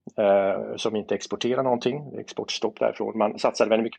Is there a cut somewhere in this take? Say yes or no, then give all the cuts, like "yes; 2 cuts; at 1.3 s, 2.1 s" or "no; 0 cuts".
no; 0 cuts